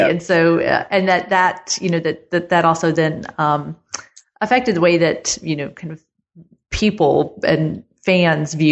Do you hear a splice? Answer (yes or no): no